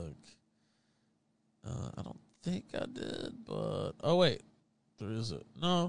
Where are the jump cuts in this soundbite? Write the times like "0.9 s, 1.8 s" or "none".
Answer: none